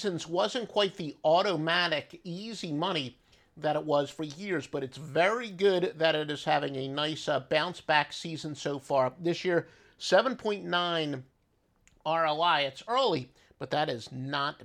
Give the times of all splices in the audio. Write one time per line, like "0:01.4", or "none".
none